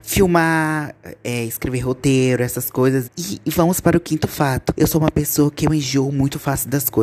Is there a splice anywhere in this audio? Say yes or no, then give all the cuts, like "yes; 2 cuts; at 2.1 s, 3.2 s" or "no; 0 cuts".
yes; 2 cuts; at 3.0 s, 4.7 s